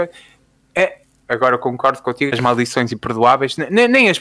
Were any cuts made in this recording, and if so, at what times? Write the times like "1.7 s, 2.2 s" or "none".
1.2 s, 2.3 s